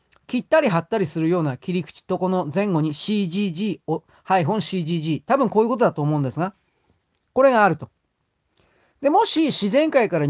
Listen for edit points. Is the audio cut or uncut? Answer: uncut